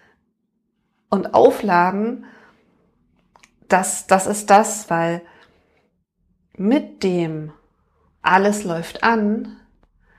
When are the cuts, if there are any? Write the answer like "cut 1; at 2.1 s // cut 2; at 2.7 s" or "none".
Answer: cut 1; at 4.9 s